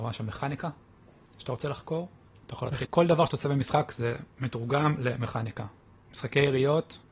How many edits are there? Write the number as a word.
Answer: one